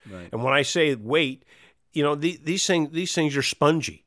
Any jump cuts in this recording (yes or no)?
no